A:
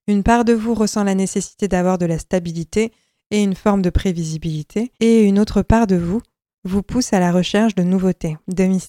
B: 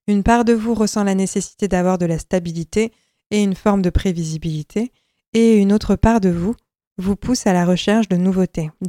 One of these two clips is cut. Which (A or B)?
A